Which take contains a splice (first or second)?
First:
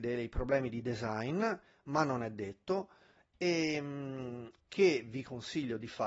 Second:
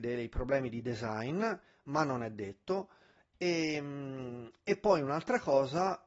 first